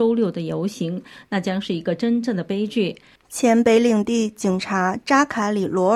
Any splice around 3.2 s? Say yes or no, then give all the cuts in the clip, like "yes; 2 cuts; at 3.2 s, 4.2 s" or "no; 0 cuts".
yes; 1 cut; at 3.2 s